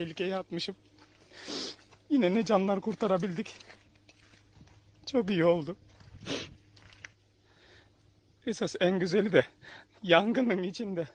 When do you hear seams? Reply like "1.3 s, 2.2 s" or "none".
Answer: none